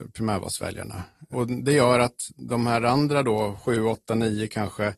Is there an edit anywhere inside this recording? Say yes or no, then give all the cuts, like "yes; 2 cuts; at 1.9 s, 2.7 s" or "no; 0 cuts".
no; 0 cuts